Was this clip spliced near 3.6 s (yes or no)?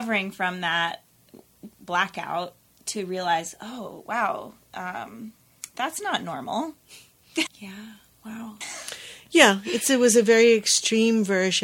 no